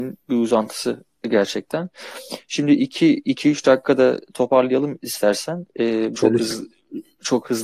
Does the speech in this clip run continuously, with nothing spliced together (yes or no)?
no